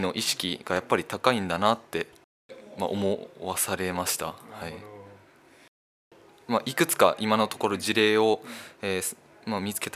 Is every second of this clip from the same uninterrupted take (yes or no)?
yes